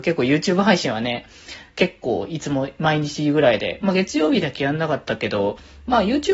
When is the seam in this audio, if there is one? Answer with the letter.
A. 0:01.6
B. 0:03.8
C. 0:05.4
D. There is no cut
D